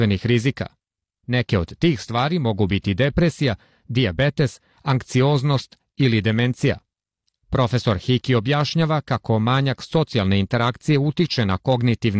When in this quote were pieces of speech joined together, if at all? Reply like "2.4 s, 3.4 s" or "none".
none